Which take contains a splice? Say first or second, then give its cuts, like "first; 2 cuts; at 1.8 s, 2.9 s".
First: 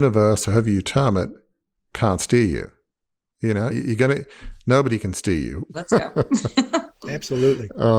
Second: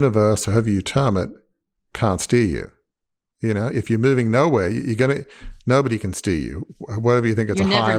first; 2 cuts; at 3.7 s, 5.7 s